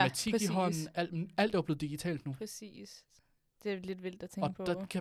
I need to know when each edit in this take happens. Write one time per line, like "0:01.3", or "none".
none